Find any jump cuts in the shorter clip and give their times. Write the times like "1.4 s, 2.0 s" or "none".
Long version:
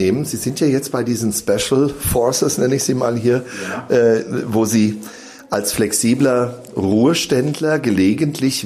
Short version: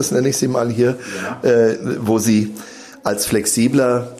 none